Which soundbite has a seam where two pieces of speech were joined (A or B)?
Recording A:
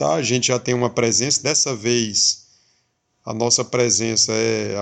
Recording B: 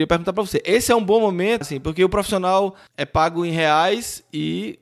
B